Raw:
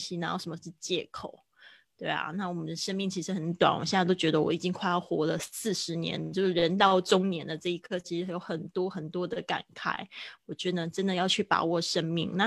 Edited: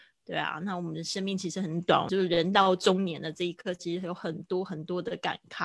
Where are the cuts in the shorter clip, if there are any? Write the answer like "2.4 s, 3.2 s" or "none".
2.1 s